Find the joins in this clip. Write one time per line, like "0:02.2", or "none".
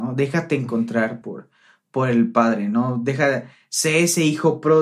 none